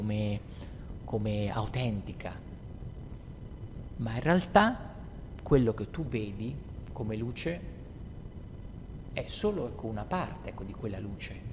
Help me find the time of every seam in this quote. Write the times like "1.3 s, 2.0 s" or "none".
none